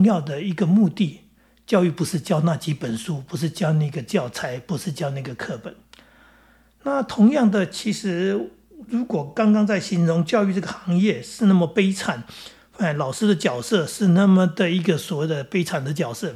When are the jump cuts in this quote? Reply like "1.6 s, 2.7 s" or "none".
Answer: none